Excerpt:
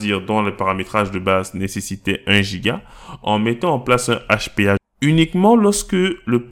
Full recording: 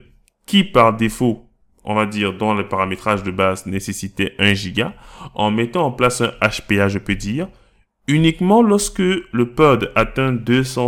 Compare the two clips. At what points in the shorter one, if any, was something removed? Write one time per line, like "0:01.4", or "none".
0:04.8

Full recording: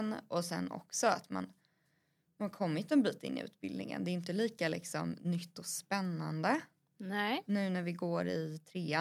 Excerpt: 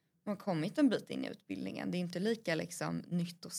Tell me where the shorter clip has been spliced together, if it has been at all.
none

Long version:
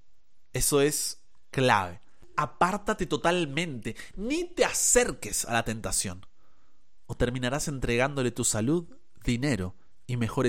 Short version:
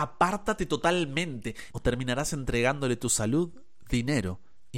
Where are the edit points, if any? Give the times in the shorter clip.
0:01.7

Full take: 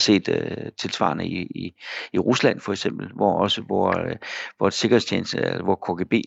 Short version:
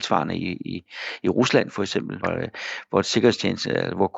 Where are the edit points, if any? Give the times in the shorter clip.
0:02.2

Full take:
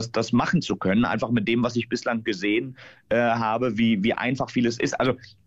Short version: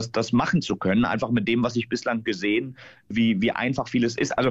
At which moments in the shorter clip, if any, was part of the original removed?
0:03.1

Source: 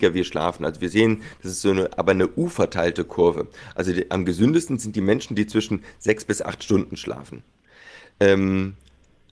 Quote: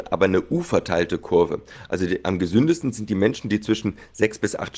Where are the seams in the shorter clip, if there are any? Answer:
none

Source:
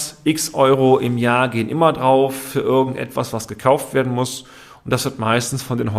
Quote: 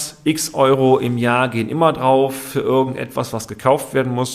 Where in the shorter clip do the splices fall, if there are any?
none

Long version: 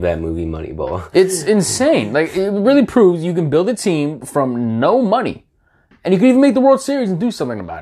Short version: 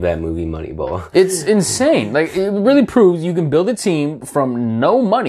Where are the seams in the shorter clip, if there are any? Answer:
none

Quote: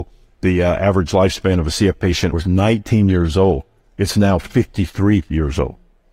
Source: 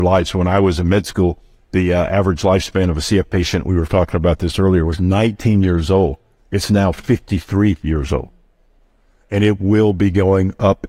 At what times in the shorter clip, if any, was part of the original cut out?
0:02.3

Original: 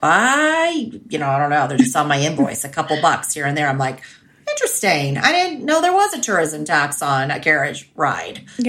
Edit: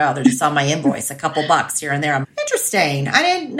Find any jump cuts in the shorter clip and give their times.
0:02.2

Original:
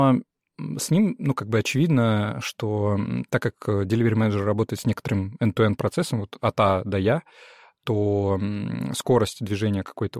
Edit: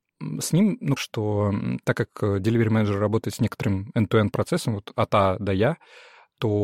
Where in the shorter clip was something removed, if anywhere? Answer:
0:01.0

